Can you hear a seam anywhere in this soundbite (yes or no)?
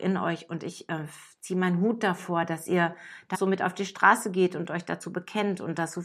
yes